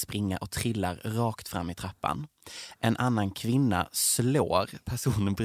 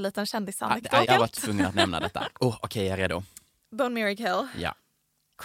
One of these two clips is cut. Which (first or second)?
second